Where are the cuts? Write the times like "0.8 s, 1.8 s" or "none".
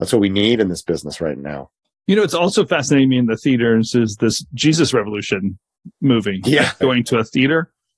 6.8 s

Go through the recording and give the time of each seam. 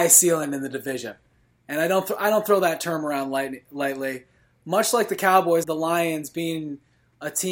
5.6 s

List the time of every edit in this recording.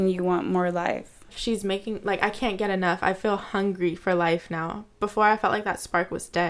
1.3 s

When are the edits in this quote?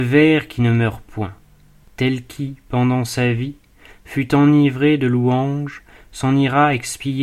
1.8 s

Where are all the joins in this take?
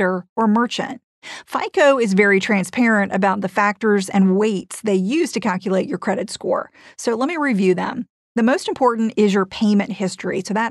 none

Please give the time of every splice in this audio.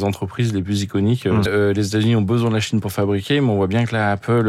1.5 s

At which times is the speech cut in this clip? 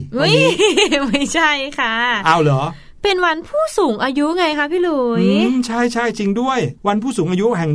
6.8 s

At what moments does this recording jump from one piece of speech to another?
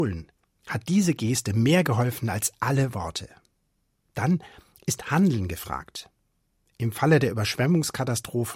4.0 s

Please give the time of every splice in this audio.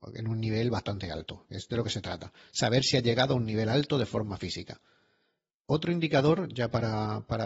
5.5 s

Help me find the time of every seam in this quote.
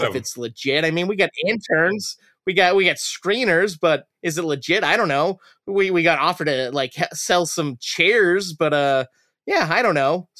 none

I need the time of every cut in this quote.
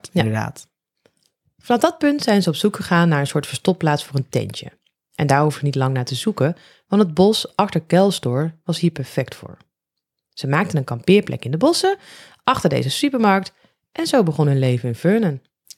none

